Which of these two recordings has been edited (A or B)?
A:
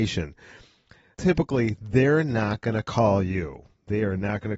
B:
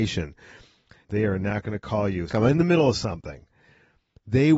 B